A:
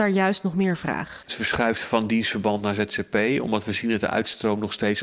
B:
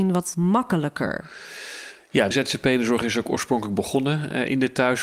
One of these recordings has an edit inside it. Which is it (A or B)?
B